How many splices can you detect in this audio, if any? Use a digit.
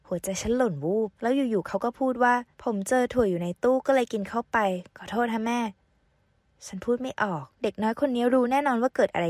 3